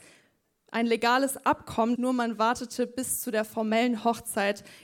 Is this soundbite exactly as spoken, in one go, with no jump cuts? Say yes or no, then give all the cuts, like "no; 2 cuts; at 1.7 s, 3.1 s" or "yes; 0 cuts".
no; 1 cut; at 2.0 s